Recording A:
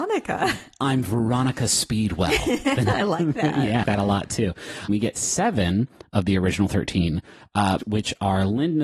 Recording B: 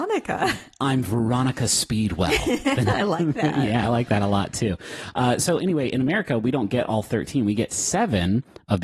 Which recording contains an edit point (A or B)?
A